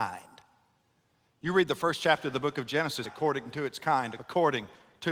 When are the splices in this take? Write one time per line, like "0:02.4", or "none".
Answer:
0:03.0
0:04.2